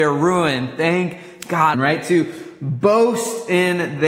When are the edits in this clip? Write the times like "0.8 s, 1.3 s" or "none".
1.7 s